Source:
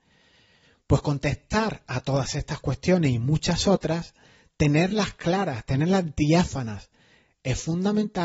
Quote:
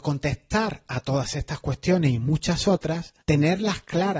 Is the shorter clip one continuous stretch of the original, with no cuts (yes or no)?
no